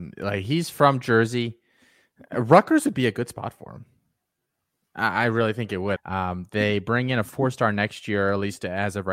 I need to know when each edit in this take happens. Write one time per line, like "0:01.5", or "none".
0:06.0